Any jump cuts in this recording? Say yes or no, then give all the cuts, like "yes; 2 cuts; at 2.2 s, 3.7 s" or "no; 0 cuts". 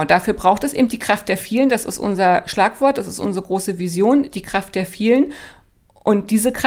no; 0 cuts